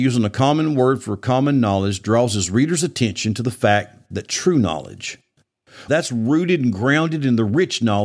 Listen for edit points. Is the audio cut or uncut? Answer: cut